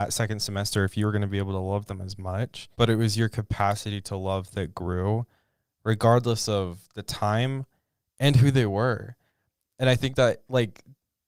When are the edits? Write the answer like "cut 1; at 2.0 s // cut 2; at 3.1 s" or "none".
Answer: cut 1; at 2.7 s